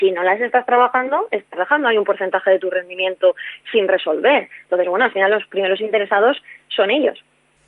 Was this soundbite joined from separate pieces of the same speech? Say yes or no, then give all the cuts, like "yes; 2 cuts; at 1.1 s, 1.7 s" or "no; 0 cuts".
no; 0 cuts